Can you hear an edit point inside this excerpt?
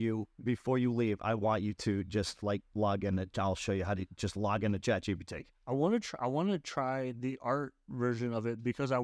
no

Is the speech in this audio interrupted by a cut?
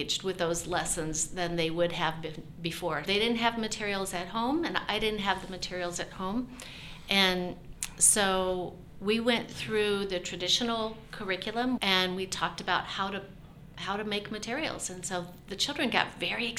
yes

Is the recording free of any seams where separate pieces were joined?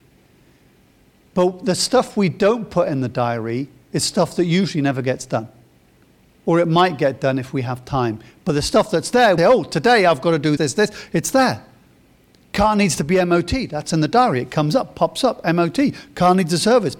no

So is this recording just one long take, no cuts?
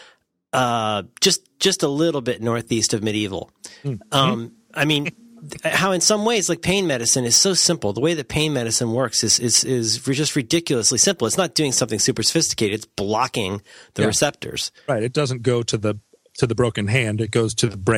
yes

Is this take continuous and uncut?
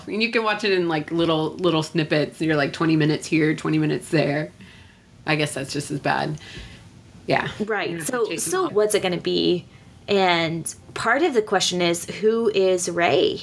no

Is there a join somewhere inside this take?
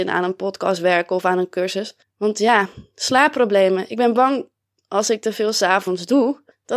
no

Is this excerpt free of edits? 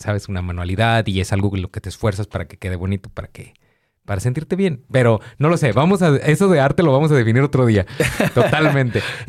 yes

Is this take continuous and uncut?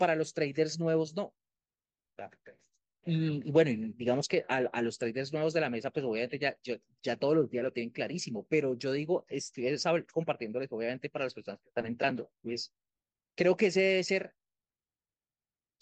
no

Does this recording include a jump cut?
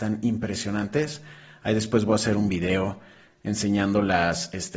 no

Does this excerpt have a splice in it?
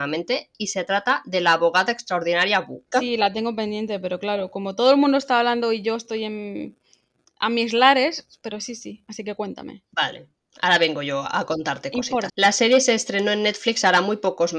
yes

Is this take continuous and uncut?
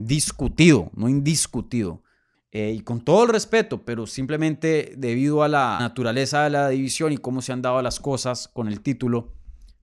no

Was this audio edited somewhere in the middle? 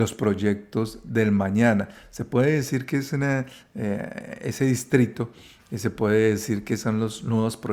no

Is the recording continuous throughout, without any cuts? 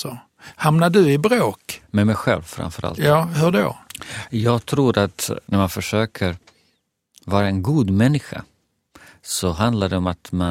yes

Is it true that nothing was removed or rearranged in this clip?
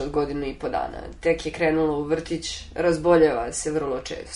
yes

